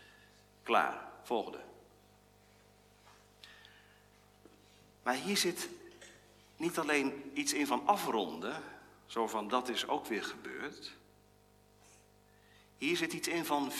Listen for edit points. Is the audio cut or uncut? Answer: uncut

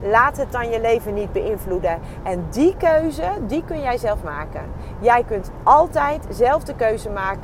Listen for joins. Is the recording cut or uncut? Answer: uncut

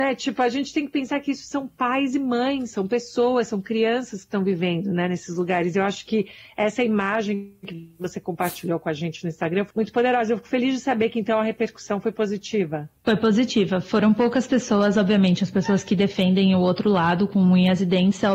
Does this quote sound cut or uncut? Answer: cut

